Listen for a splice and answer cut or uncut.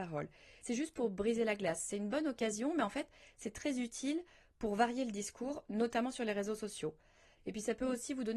uncut